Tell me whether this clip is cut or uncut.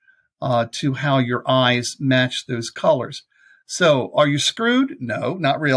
uncut